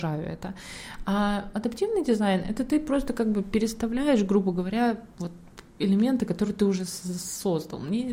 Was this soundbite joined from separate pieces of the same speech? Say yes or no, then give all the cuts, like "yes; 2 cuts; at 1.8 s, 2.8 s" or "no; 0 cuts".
no; 0 cuts